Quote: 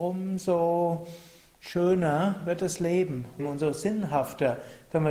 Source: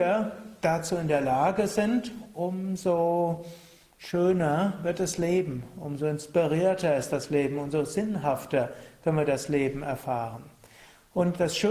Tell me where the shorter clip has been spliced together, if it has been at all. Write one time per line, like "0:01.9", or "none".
0:03.4